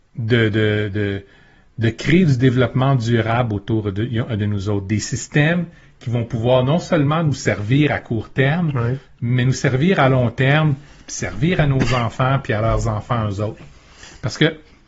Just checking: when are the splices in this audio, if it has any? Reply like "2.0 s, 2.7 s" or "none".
none